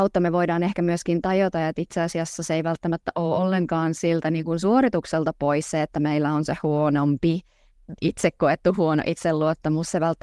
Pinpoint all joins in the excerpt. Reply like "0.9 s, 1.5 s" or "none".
none